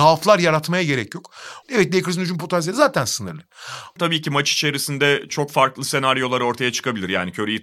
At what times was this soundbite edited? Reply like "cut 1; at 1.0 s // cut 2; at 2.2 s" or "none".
cut 1; at 1.6 s // cut 2; at 4.0 s